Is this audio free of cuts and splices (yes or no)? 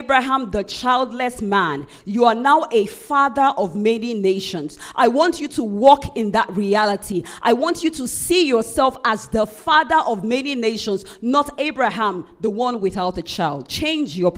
yes